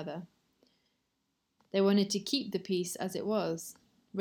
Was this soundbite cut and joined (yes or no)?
yes